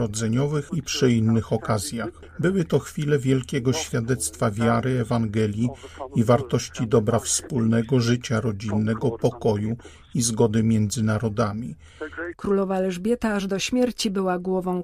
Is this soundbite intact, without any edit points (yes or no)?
no